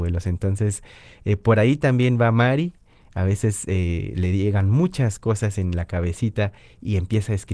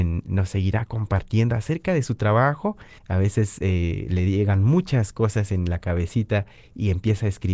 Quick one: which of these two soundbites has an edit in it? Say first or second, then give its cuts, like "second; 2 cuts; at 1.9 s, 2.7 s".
second; 1 cut; at 3.0 s